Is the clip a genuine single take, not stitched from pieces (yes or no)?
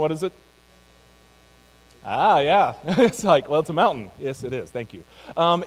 yes